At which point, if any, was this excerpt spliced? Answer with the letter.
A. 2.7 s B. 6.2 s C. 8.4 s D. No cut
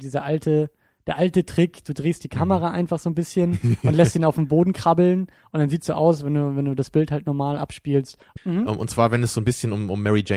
C